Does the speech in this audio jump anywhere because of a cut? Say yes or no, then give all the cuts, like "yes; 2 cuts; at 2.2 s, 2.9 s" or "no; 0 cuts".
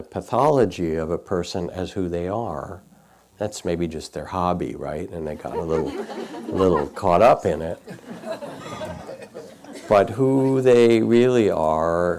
no; 0 cuts